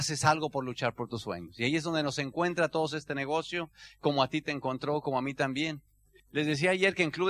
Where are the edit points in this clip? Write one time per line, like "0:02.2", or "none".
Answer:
0:06.2